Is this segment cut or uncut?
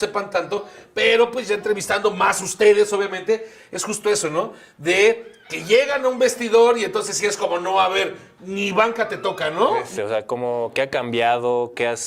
cut